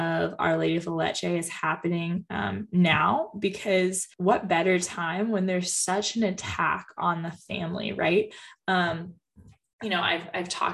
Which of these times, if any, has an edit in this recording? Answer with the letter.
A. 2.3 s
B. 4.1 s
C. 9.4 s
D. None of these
B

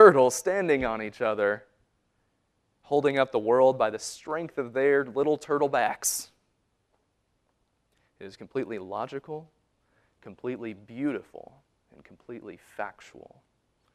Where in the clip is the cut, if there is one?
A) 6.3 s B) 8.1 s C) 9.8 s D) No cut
D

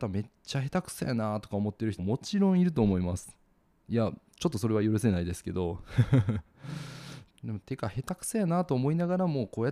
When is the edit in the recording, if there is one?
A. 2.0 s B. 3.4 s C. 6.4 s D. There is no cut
A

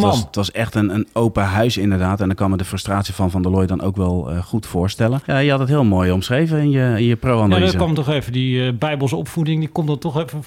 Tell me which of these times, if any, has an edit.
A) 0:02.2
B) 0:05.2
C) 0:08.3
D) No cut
B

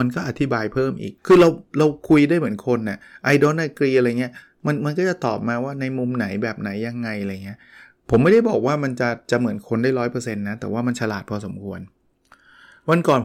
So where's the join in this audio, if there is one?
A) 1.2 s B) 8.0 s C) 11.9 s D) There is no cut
A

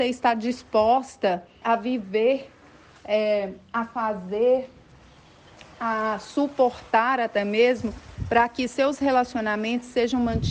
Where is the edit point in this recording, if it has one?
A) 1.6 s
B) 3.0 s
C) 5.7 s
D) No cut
A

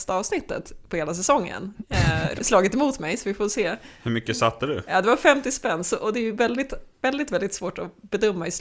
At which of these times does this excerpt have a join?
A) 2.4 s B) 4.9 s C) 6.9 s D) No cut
A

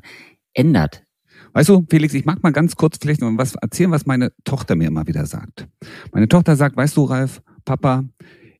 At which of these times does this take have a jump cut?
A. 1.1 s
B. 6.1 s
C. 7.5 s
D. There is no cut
D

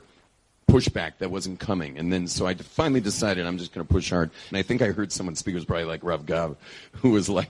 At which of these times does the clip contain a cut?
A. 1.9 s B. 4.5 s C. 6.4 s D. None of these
B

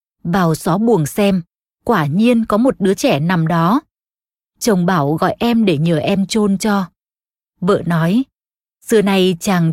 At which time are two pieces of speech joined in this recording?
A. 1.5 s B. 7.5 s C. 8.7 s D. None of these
D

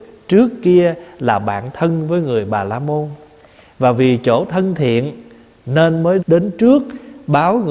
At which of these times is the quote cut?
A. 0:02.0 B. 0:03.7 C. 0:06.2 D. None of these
C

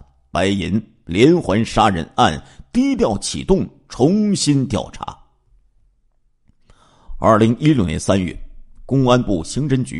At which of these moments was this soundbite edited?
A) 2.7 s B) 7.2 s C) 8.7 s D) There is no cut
D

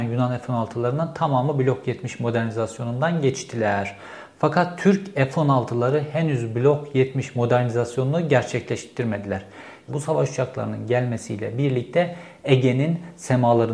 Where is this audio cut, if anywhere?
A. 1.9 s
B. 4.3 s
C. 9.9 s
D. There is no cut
C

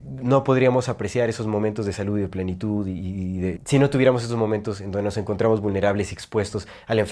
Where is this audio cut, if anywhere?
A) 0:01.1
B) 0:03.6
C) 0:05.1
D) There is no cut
B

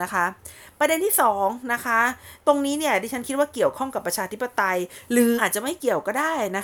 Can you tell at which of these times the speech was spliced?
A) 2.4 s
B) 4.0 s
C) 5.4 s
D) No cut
C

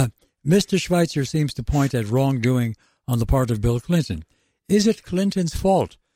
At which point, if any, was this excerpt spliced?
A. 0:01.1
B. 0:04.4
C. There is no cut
C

